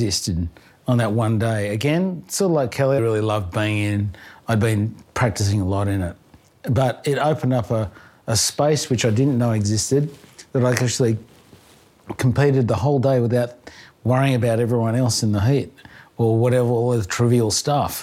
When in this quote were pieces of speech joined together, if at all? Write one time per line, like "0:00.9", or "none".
0:03.0